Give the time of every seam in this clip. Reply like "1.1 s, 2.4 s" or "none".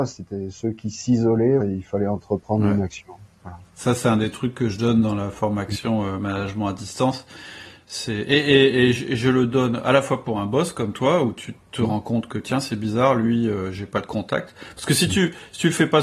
1.6 s